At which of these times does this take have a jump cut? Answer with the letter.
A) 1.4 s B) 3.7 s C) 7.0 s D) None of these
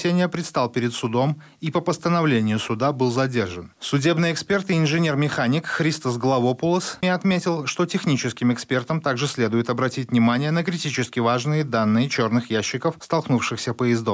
C